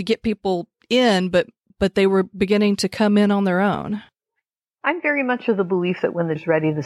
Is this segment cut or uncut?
uncut